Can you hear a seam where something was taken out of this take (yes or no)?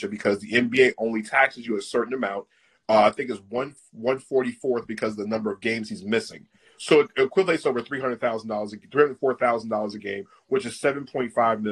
no